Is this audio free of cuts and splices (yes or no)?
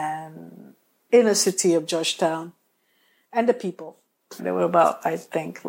no